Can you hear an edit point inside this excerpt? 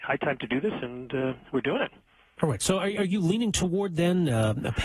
no; 0 cuts

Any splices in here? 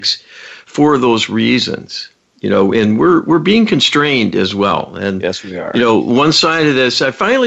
no; 0 cuts

